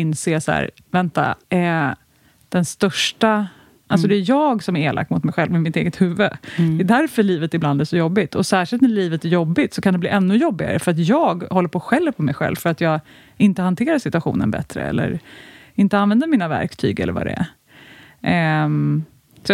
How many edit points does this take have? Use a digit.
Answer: 2